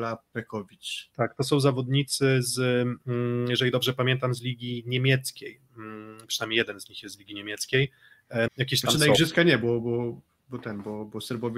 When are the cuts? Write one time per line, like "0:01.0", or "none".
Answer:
0:08.5

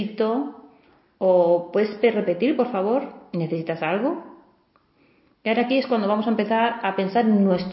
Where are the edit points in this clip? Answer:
none

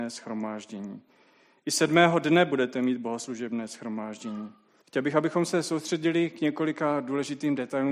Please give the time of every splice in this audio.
0:04.8

